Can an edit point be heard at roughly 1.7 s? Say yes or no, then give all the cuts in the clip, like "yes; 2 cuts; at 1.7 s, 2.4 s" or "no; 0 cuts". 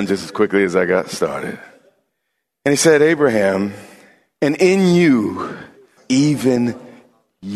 no; 1 cut; at 6.0 s